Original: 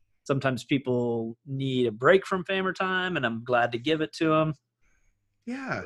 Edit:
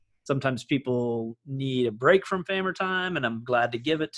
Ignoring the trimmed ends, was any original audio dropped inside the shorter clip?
no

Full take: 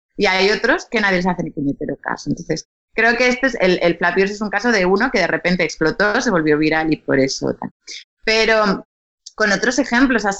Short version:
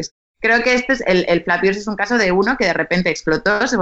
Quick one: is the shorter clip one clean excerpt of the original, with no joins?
yes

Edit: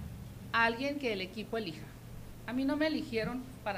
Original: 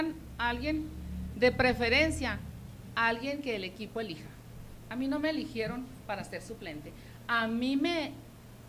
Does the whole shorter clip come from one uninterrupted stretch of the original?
yes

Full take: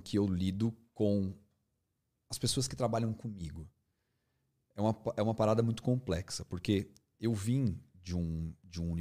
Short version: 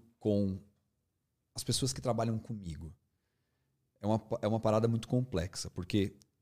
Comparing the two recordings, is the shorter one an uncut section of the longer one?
yes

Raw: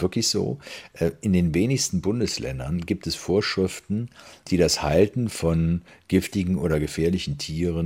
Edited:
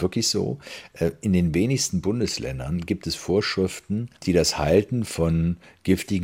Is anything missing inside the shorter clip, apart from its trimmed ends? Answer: yes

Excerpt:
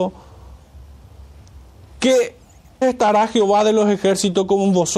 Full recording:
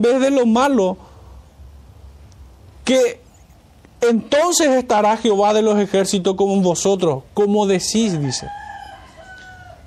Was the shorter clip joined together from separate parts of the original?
yes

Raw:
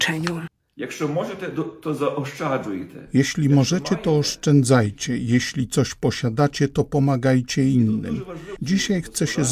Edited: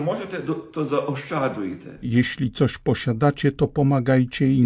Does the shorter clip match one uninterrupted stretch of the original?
no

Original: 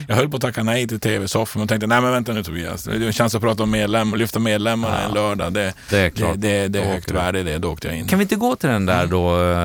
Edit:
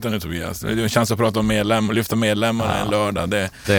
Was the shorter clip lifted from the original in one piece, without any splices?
yes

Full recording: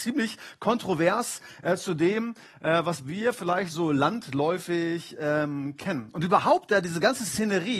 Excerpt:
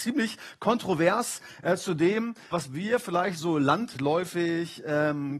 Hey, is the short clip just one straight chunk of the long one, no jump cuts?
no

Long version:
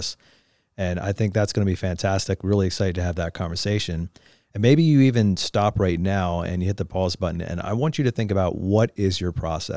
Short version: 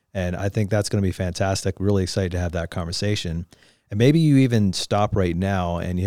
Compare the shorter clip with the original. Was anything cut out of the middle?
no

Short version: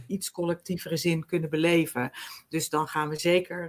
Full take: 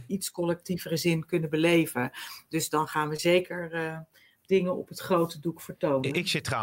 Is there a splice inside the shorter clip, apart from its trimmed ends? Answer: no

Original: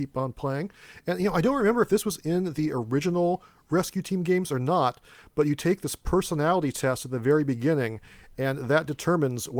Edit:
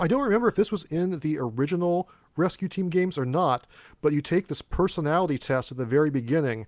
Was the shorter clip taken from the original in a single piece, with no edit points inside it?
yes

